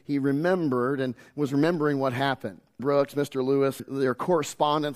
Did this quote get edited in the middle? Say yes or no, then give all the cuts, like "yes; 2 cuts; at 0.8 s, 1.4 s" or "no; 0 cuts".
yes; 2 cuts; at 2.8 s, 3.8 s